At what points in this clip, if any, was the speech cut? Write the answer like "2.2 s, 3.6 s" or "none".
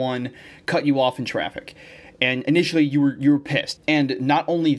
3.8 s